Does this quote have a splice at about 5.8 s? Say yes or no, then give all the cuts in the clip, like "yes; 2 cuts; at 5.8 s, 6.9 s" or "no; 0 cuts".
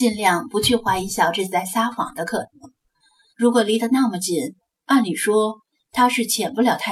yes; 2 cuts; at 3.3 s, 5.8 s